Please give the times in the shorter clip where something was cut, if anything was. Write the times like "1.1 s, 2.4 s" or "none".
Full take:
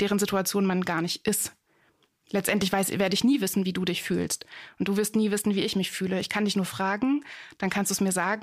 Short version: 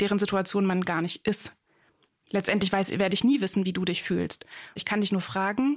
4.8 s